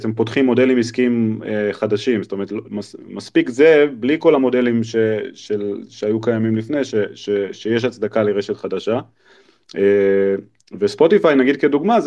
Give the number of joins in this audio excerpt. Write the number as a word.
zero